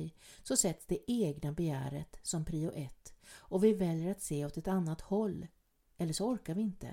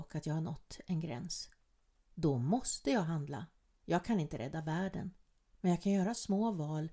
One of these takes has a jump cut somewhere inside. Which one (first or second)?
second